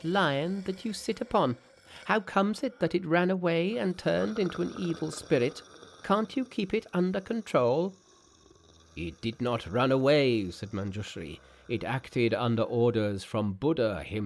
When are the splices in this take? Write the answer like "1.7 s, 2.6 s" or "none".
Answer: none